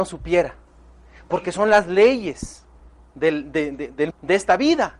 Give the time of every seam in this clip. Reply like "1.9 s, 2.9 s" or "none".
4.1 s